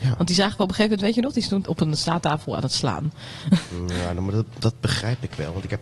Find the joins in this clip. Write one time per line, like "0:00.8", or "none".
0:01.6